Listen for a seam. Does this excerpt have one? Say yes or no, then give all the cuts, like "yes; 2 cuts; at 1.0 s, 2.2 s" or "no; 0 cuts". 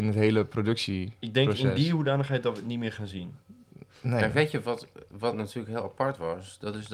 no; 0 cuts